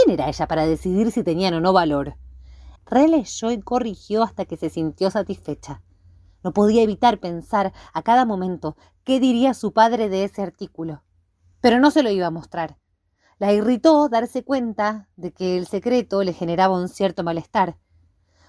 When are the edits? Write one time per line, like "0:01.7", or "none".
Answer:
0:02.8

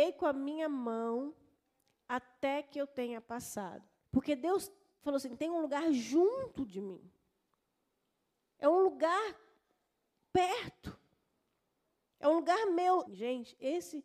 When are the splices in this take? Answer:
0:04.0
0:13.1

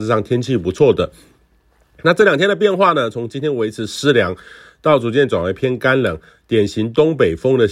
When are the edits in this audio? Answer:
none

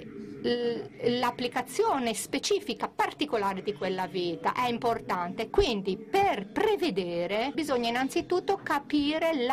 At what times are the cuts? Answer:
0:05.5
0:07.5

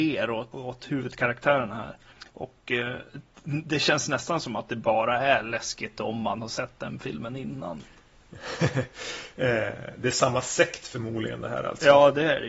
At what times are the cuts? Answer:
none

